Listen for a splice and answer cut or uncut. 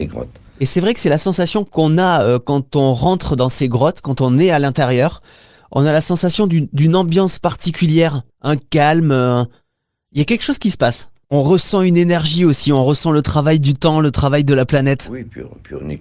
cut